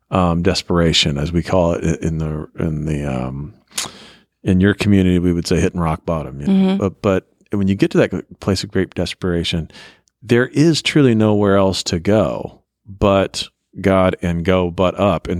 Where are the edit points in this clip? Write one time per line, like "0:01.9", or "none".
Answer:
none